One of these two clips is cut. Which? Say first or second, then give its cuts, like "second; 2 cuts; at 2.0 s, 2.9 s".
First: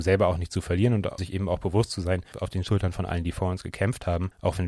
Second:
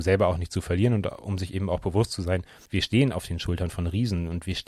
first; 2 cuts; at 1.2 s, 2.3 s